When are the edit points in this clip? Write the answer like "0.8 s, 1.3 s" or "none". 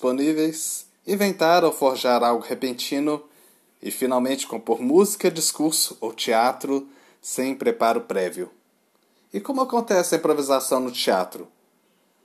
none